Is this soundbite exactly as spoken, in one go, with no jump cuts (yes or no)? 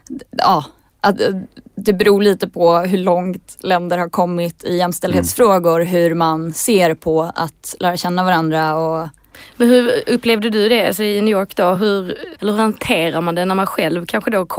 yes